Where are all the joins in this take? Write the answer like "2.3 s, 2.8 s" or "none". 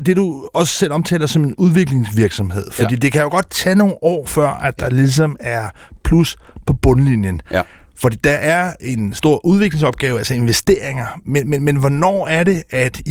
none